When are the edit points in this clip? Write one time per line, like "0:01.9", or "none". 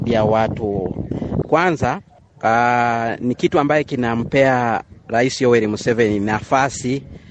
0:01.4